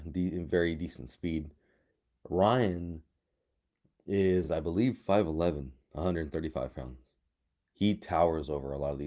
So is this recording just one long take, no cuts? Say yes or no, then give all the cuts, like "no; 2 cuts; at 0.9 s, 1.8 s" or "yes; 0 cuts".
yes; 0 cuts